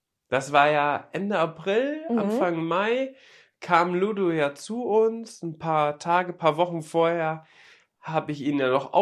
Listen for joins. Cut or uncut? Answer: uncut